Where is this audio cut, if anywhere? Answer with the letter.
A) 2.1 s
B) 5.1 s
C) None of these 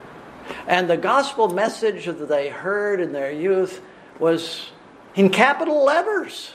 B